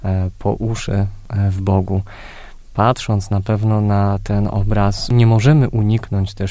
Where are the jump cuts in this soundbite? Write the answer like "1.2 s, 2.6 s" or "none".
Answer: none